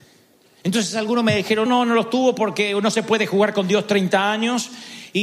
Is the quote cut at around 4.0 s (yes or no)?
no